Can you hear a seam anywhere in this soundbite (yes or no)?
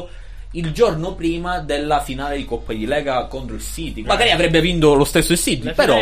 yes